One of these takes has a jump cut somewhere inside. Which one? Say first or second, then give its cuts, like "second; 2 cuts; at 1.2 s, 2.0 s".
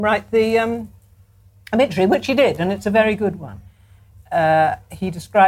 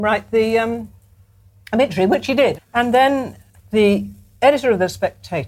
second; 1 cut; at 2.5 s